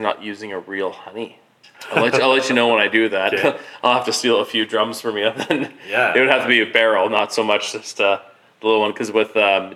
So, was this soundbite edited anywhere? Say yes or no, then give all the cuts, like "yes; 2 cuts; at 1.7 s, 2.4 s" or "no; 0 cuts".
yes; 1 cut; at 1.6 s